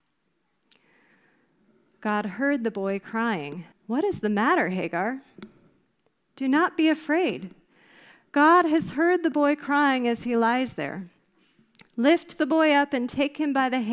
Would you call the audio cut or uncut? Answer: cut